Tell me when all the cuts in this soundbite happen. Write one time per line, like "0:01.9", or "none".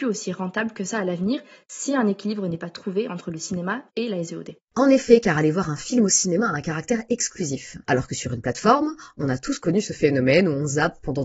0:07.8